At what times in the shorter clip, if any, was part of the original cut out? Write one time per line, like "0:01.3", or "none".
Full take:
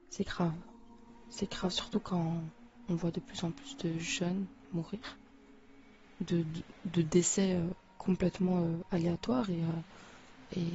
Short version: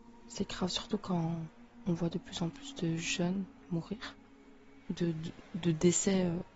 0:04.8

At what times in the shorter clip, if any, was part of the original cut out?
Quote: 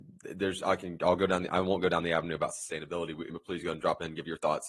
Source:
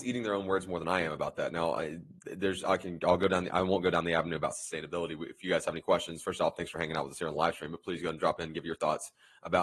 0:03.3

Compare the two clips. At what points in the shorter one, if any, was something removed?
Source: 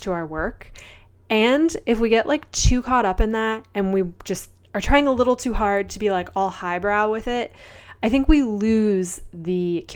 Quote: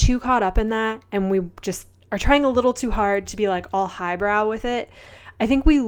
none

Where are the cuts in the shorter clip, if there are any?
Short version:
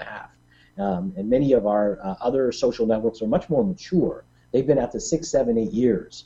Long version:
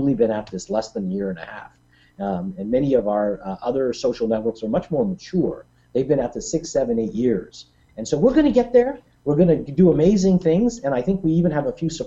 none

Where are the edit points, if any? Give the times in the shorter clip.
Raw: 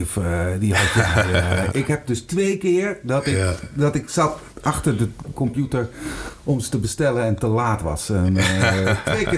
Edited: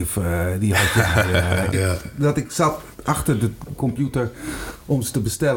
0:01.7

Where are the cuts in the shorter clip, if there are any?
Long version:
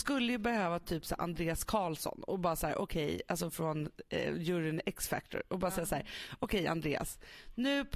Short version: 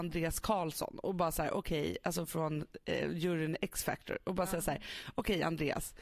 none

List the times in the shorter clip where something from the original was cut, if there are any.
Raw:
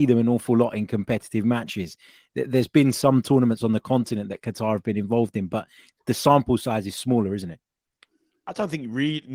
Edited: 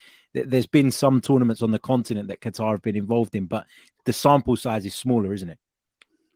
none

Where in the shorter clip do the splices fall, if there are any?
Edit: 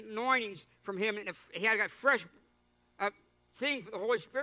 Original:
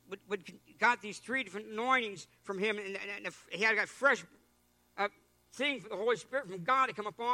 0:01.2

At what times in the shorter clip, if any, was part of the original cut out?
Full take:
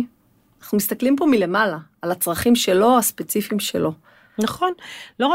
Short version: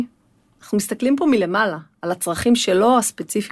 none

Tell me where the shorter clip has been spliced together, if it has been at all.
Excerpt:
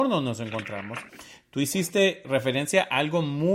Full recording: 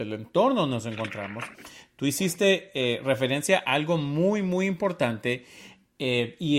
0:02.2

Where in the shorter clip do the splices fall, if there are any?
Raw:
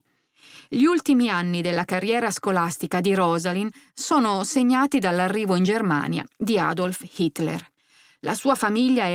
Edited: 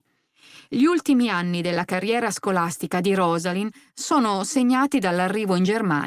none

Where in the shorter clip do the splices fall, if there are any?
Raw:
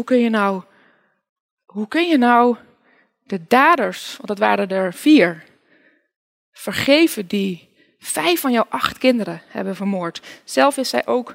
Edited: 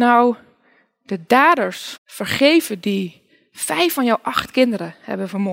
0:02.0

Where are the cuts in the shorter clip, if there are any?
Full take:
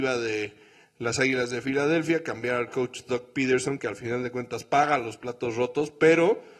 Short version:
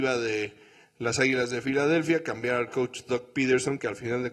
none

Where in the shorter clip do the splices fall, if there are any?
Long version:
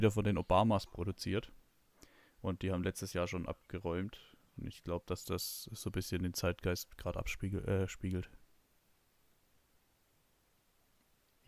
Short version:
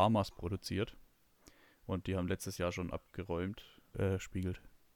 0:03.9

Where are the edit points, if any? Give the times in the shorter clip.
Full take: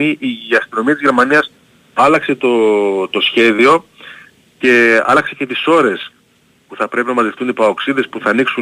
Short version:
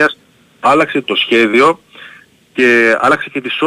0:01.0

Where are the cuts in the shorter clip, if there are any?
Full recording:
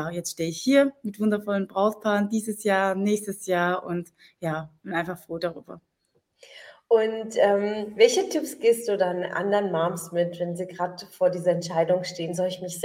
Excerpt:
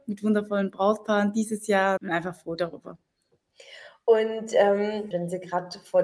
0:02.0
0:05.1

